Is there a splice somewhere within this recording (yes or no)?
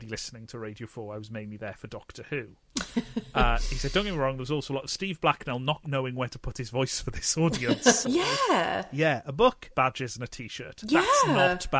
yes